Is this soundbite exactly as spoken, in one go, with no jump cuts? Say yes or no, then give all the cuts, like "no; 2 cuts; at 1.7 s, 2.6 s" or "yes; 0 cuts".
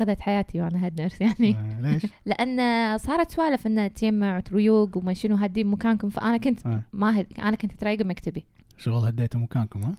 no; 1 cut; at 2.1 s